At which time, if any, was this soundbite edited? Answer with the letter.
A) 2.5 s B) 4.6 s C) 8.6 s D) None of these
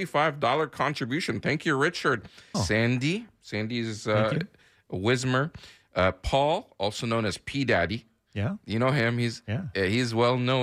A